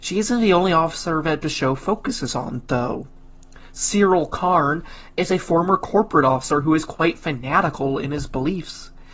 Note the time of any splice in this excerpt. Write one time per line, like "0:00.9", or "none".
none

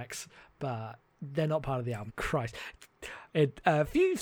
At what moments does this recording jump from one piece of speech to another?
0:02.1

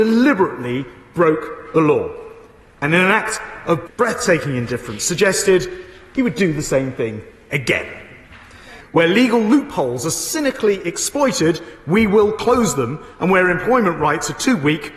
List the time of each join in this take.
0:03.9
0:08.8

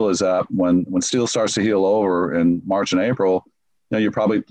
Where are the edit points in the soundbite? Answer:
none

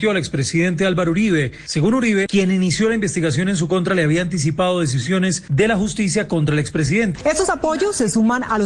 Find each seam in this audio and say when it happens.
0:02.3
0:07.2

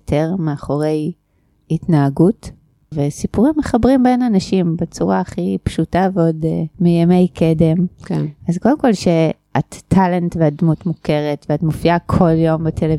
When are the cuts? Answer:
0:02.9
0:06.7

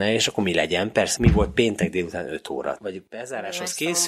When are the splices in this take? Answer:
0:01.2
0:02.8

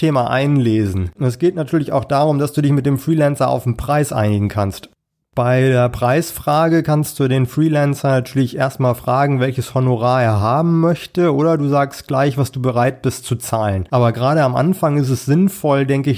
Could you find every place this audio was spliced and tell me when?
0:01.2

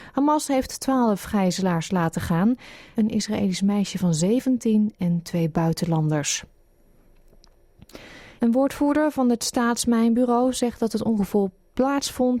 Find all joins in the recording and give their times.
0:02.9
0:08.4

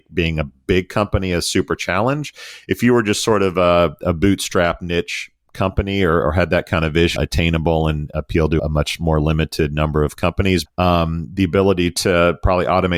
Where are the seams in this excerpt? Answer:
0:07.2
0:08.6
0:10.7

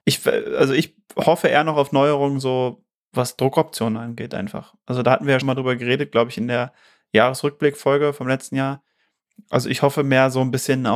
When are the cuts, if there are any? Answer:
0:05.4

